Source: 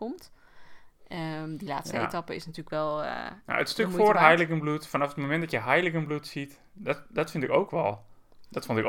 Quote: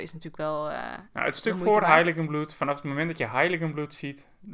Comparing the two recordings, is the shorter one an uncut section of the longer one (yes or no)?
yes